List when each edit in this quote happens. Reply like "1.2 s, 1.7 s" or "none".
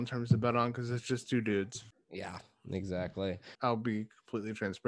3.5 s